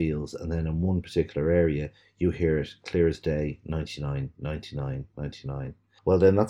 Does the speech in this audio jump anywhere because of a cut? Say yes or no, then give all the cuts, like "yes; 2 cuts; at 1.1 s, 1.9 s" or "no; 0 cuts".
no; 0 cuts